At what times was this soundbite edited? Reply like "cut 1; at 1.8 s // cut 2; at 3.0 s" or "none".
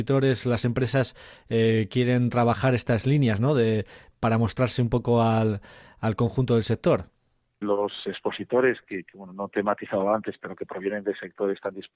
cut 1; at 7.6 s